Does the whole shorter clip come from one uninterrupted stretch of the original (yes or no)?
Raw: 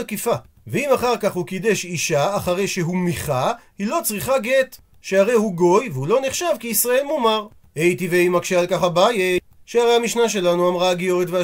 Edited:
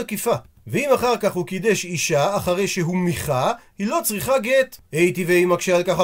no